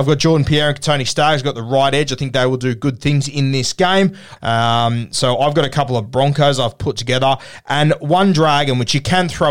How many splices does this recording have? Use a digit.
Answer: 1